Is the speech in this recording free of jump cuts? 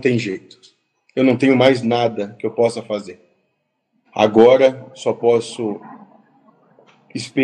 no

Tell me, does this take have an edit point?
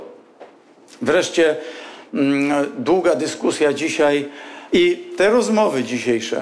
yes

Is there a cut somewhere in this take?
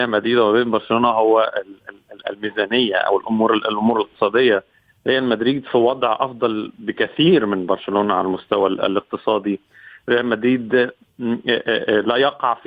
no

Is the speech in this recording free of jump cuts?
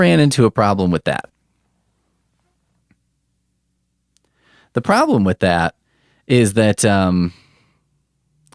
yes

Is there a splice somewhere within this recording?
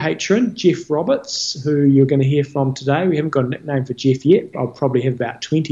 yes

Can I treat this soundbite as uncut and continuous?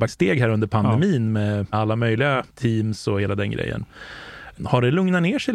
no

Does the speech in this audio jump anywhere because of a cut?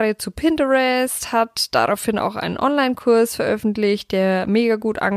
no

